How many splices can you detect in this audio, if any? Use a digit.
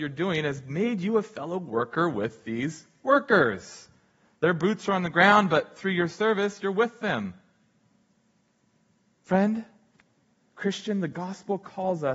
0